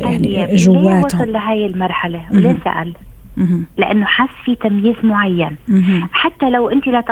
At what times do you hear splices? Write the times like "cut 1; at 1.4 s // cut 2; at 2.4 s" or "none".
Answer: none